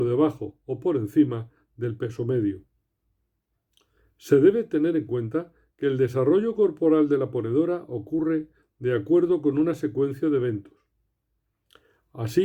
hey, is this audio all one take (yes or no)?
yes